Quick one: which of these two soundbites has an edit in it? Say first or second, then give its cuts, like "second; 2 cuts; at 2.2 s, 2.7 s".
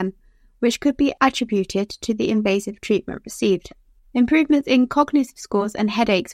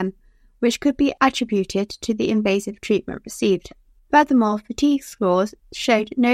first; 1 cut; at 4.0 s